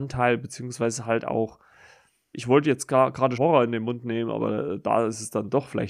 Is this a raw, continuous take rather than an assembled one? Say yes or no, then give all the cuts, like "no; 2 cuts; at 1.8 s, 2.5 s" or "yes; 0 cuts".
no; 2 cuts; at 2.3 s, 3.4 s